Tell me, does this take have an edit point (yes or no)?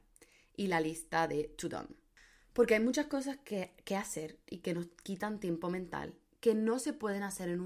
no